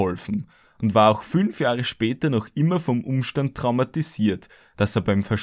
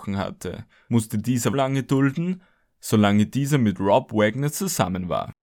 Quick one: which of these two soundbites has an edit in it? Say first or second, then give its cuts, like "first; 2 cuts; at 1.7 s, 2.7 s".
second; 1 cut; at 1.5 s